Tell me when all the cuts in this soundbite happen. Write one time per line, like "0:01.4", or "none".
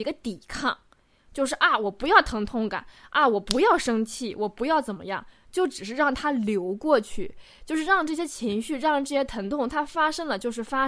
none